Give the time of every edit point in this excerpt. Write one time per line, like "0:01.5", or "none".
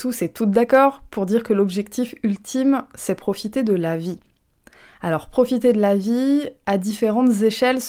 none

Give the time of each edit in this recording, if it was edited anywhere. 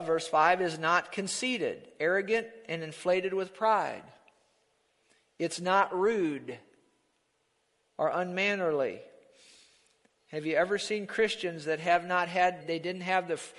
0:12.6

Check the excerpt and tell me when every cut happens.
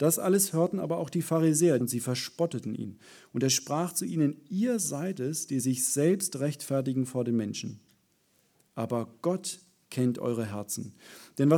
0:01.8

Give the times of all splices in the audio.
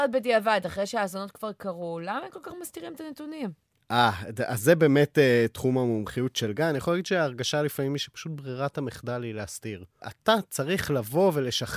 none

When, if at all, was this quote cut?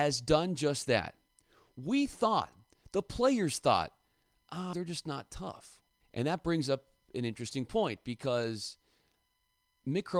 0:04.7
0:06.0

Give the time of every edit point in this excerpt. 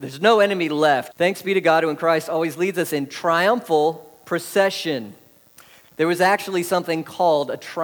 0:01.1
0:05.8

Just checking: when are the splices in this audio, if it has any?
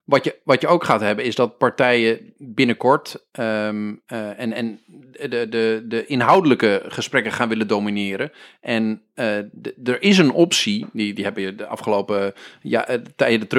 none

